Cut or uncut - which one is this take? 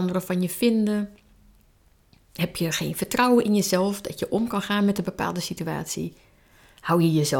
uncut